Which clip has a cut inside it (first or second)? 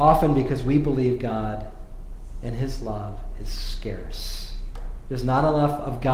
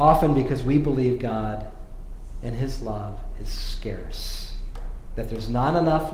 first